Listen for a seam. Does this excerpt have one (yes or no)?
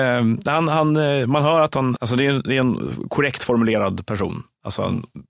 yes